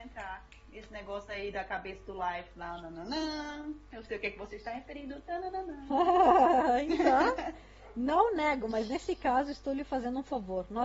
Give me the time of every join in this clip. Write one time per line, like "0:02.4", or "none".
none